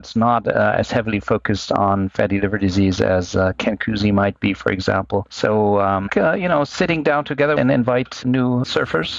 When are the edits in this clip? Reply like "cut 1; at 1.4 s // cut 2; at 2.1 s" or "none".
cut 1; at 6.1 s // cut 2; at 7.6 s